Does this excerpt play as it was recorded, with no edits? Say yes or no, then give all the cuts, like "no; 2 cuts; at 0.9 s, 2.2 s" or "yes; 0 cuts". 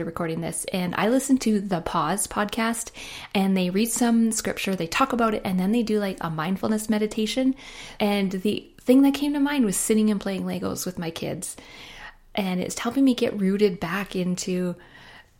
no; 2 cuts; at 8.0 s, 12.7 s